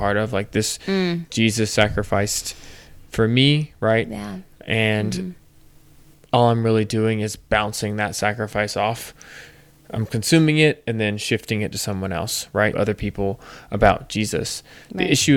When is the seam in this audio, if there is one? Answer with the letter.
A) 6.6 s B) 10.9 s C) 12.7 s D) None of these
C